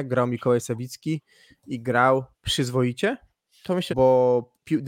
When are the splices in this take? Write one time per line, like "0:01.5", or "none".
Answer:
0:02.3
0:03.9